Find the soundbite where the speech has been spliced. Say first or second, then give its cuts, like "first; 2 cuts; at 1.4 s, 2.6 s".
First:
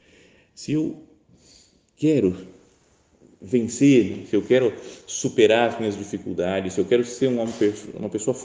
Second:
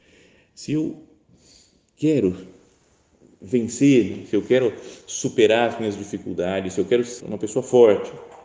second; 1 cut; at 7.2 s